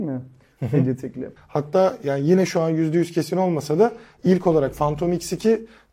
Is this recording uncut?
no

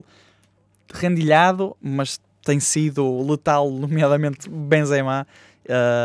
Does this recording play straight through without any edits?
no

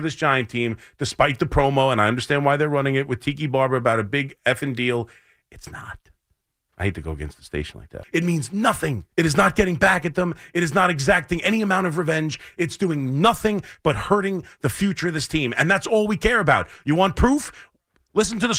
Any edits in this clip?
yes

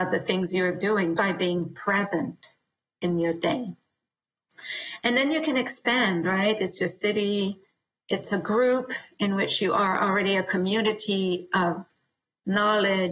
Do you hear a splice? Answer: yes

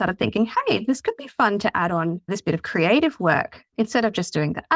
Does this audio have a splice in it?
no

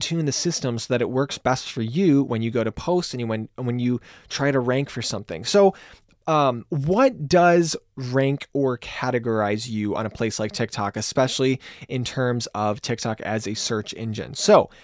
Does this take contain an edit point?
no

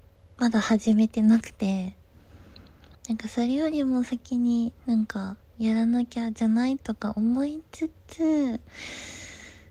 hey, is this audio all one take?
no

